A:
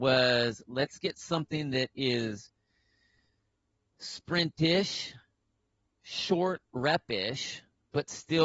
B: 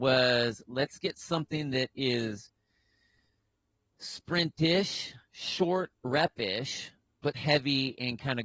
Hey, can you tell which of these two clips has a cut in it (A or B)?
B